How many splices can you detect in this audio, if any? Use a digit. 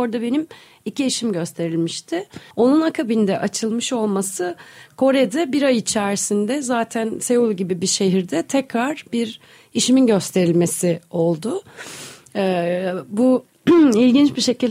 1